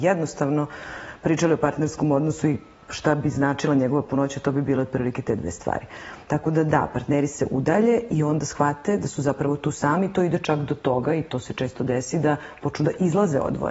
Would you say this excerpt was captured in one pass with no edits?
yes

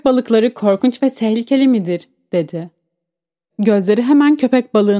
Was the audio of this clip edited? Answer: yes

